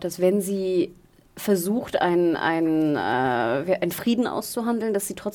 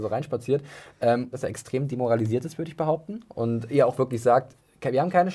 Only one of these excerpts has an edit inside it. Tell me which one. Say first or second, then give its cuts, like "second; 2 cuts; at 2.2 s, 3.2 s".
second; 1 cut; at 1.3 s